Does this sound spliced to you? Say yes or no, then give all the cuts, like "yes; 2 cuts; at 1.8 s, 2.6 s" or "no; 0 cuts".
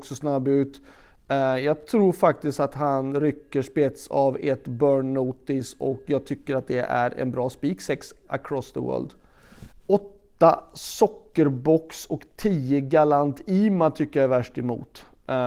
yes; 2 cuts; at 8.3 s, 9.7 s